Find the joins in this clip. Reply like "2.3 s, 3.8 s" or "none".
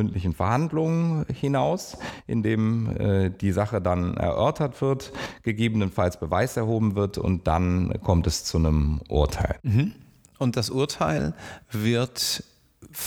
none